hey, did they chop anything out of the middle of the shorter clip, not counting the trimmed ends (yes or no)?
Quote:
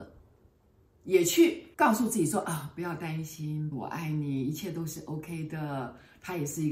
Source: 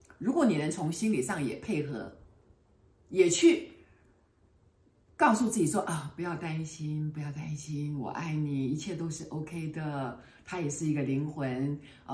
yes